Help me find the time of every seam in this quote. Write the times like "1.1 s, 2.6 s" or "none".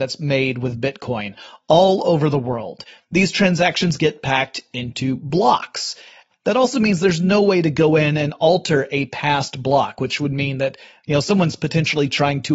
3.0 s, 6.3 s